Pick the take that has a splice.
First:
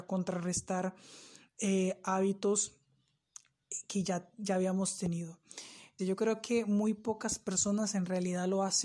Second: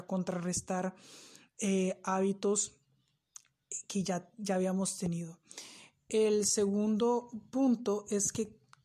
first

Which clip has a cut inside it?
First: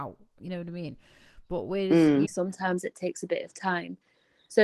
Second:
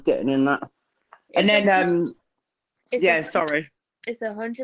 first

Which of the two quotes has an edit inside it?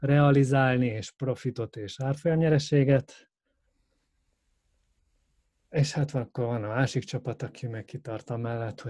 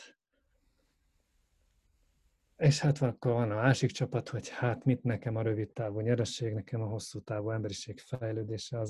second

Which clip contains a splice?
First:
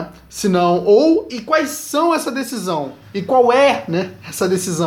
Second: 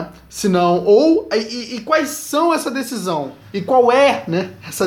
first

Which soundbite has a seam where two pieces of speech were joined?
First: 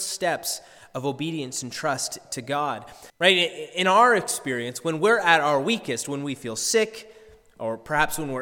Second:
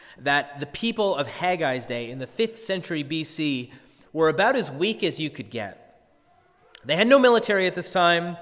first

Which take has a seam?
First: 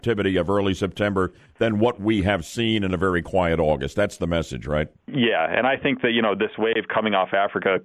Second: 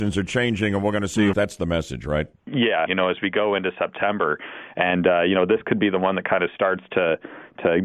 second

